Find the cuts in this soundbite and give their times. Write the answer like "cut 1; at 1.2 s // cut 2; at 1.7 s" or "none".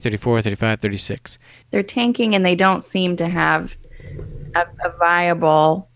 cut 1; at 1.6 s